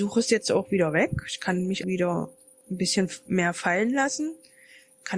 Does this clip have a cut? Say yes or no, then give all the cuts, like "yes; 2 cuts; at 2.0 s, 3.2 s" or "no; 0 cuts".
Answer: yes; 1 cut; at 1.8 s